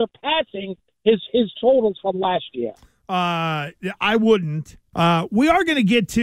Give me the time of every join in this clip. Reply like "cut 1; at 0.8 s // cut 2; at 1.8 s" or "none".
cut 1; at 4.9 s